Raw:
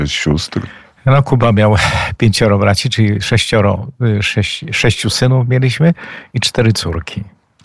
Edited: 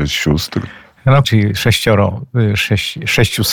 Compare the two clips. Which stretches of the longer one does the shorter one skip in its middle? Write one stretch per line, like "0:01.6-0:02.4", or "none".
0:01.2-0:02.9